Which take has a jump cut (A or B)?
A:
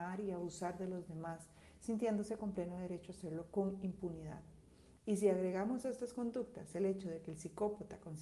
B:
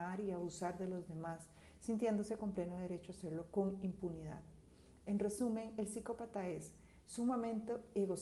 A